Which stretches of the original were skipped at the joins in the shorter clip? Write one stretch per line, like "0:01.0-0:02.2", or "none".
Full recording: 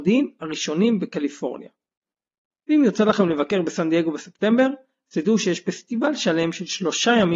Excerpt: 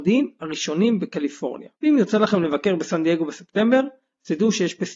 0:01.8-0:02.6